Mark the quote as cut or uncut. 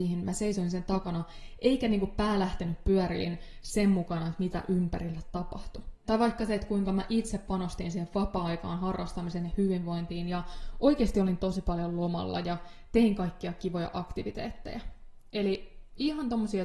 cut